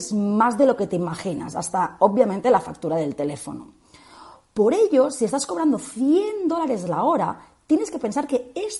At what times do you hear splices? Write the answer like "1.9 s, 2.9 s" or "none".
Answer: none